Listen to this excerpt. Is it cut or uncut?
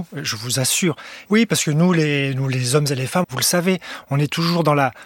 cut